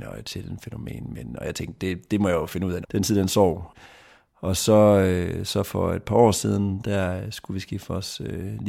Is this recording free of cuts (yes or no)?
no